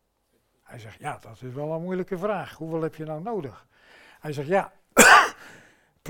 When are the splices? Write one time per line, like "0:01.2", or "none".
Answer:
0:01.0